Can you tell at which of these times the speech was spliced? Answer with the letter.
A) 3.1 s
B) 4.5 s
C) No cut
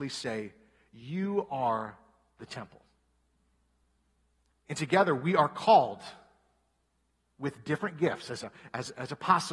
B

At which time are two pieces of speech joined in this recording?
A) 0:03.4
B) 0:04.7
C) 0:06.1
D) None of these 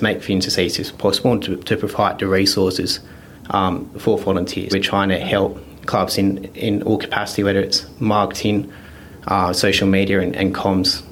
B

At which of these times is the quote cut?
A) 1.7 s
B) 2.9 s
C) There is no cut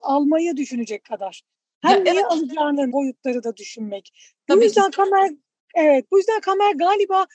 B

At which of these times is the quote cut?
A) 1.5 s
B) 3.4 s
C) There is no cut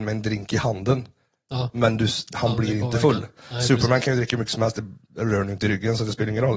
C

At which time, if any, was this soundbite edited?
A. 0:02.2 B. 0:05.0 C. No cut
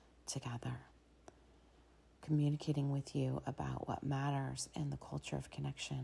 C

